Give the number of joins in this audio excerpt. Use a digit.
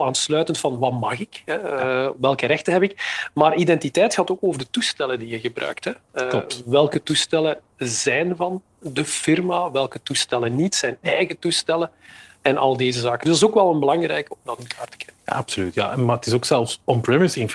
0